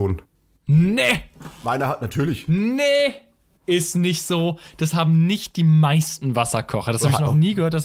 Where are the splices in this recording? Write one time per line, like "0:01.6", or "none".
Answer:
none